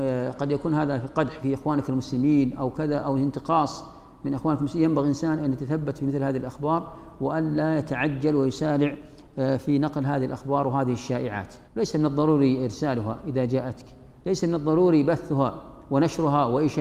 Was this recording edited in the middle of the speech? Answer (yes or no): yes